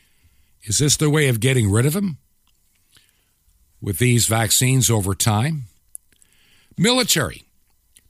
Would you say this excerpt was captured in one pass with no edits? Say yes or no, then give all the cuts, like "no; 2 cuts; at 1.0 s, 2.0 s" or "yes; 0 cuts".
yes; 0 cuts